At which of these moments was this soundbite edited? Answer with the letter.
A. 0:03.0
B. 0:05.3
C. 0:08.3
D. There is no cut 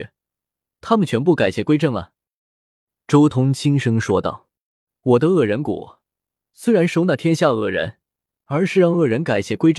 C